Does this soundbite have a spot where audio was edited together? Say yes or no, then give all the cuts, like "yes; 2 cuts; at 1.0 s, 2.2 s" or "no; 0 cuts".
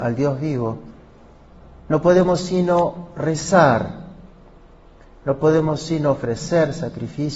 no; 0 cuts